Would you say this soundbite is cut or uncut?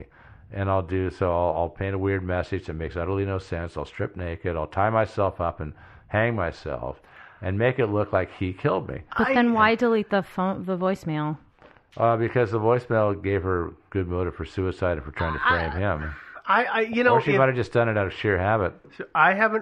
uncut